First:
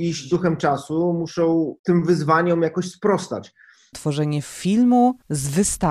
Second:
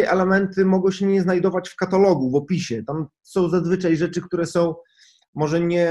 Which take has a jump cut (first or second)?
first